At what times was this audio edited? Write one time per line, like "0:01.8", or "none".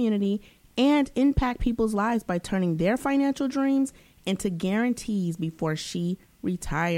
none